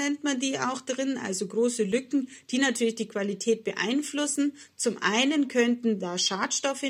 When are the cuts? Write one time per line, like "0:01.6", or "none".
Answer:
none